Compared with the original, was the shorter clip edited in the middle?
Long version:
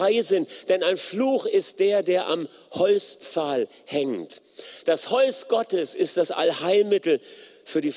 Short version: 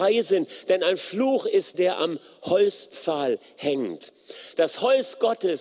yes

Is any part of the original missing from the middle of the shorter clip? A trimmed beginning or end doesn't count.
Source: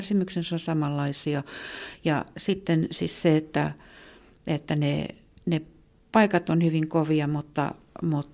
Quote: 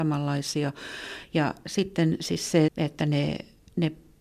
yes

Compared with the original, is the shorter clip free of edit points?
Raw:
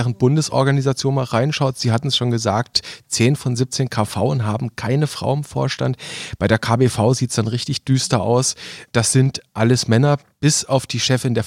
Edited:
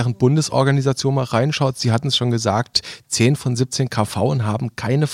yes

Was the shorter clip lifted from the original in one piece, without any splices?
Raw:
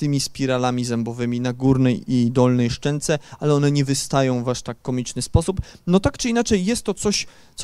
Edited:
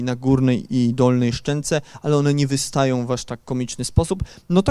yes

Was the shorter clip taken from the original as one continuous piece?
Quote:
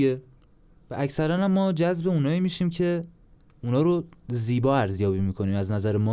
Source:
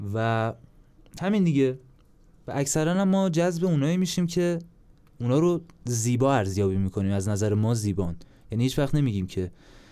yes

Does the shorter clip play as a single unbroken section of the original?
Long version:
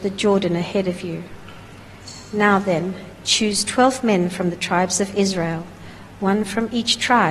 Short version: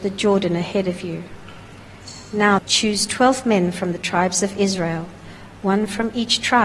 no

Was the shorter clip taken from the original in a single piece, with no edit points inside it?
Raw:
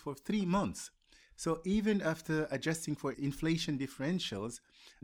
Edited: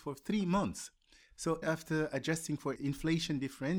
no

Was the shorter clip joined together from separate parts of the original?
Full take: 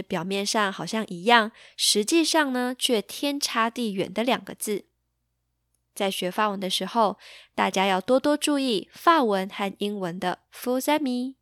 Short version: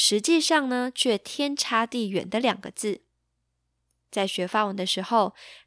no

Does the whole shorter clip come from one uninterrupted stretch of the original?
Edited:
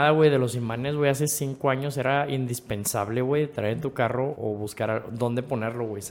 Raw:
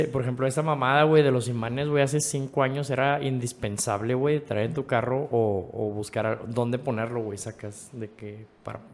no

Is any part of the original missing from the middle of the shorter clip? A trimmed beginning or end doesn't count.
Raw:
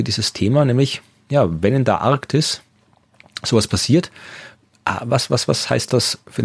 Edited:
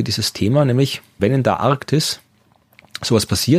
yes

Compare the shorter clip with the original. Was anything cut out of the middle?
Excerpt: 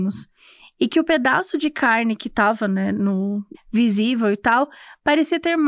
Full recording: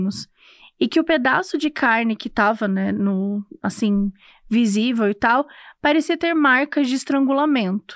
yes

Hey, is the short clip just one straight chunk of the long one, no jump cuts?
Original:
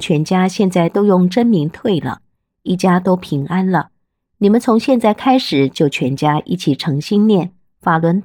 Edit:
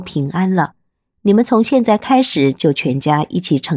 yes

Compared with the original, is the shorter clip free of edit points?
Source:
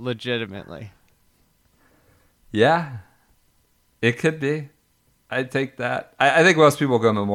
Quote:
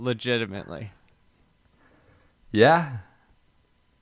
yes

